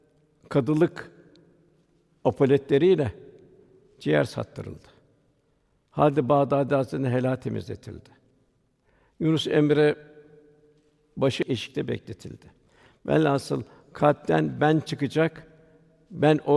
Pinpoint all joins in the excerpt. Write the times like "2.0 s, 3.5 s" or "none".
none